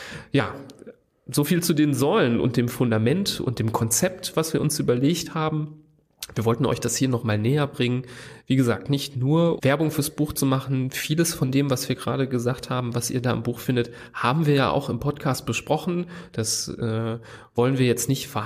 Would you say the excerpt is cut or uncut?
cut